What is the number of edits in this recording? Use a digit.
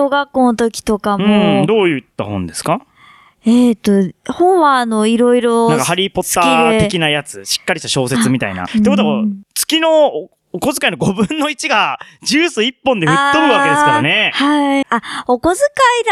2